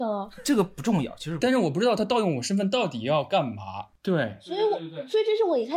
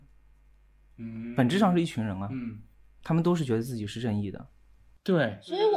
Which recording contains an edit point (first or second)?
first